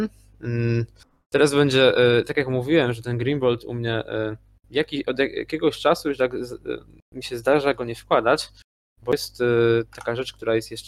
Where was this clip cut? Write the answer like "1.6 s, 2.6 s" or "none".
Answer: none